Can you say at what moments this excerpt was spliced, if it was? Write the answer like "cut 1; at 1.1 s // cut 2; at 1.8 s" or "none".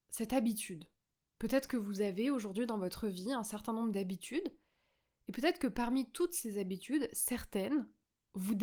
none